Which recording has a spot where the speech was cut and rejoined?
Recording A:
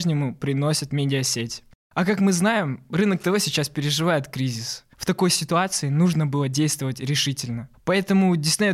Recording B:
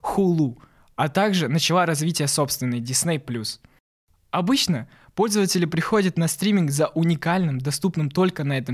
A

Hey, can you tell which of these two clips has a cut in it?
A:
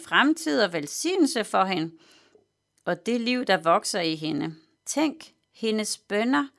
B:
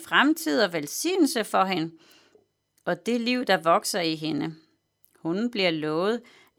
A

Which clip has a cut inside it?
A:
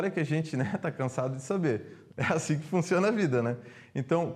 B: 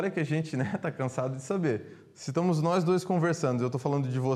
A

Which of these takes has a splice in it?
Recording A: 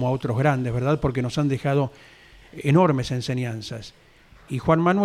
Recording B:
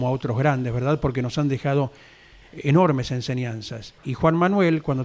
B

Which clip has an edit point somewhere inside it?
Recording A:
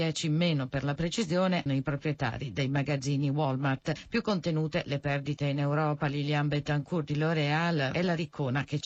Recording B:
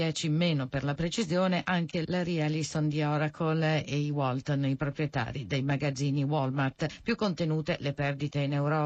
A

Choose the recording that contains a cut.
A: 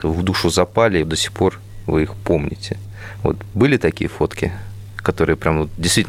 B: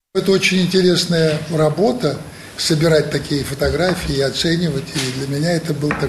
A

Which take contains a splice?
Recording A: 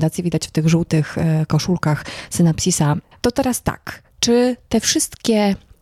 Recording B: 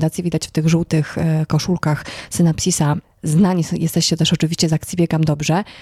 A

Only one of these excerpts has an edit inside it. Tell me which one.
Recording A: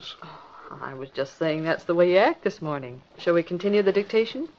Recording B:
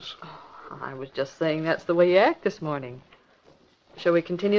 A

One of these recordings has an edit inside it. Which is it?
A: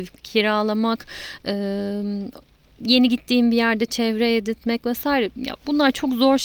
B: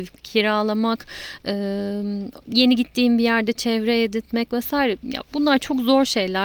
B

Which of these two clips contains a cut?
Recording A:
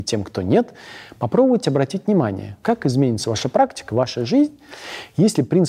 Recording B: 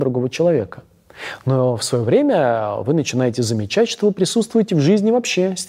A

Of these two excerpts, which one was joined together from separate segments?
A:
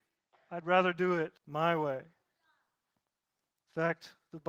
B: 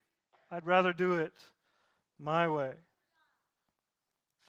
A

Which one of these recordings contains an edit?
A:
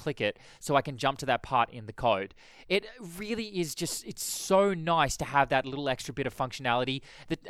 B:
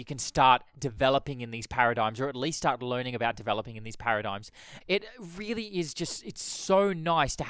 B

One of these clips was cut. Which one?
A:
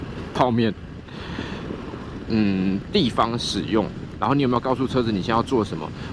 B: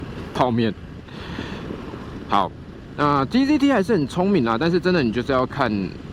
A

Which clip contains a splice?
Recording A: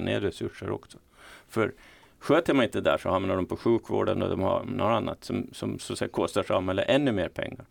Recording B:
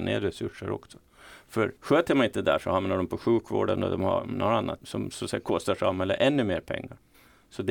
B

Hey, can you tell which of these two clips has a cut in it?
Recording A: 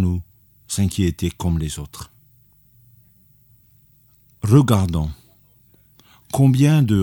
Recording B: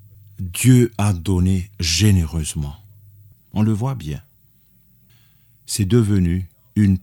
B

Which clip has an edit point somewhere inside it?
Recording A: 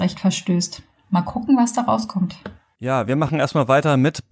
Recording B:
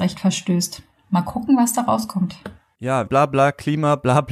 B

